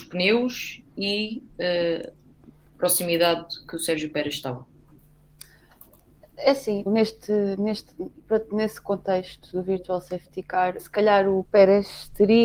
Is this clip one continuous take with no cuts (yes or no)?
no